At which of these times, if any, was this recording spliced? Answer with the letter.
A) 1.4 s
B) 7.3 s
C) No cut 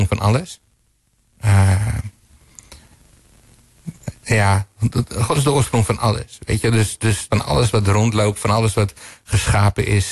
B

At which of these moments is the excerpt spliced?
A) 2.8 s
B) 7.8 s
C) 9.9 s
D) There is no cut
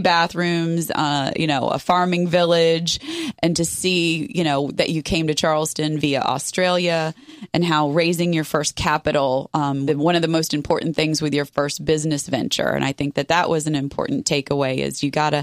C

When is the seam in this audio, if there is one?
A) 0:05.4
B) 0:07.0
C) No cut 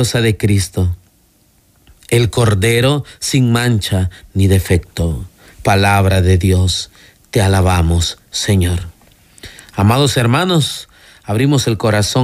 C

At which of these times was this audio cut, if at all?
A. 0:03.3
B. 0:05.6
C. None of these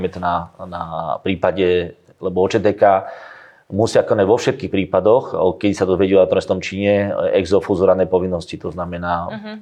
C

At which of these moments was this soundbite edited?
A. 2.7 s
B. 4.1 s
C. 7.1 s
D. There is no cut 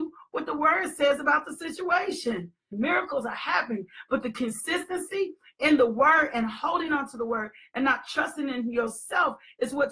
A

